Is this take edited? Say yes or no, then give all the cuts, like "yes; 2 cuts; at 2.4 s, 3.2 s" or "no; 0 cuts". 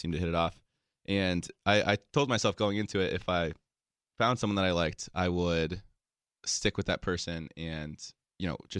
no; 0 cuts